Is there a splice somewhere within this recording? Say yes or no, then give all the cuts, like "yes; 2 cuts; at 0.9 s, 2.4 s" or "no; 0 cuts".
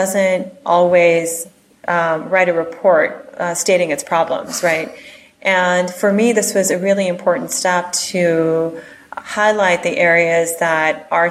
no; 0 cuts